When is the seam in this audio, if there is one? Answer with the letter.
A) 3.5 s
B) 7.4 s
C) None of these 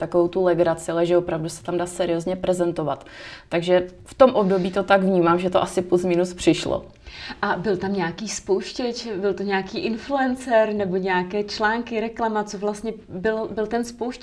C